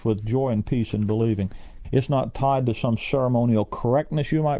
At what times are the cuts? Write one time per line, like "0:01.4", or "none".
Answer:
0:01.8